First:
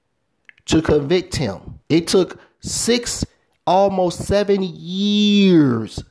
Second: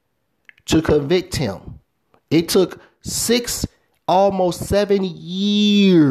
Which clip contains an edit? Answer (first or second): first